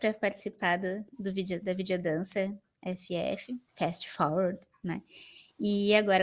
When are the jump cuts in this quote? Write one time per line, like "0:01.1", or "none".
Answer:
0:03.7